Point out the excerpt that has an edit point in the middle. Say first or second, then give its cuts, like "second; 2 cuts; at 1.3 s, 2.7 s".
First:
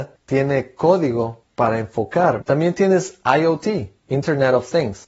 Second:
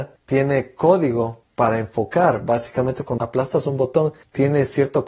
first; 1 cut; at 2.4 s